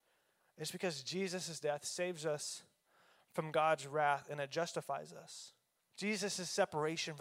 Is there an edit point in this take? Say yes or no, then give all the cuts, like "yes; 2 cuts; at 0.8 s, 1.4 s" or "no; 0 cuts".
yes; 1 cut; at 5.8 s